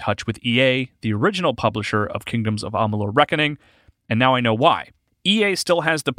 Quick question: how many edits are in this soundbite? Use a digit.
0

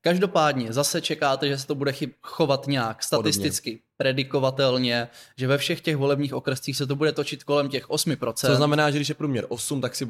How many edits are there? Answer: 0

